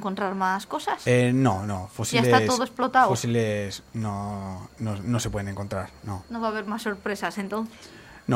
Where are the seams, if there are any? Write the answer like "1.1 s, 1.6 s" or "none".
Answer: none